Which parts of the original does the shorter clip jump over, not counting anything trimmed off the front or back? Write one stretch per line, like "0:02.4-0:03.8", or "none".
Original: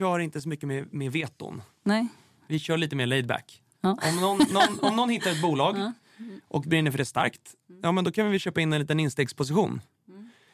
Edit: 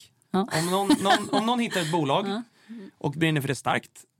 none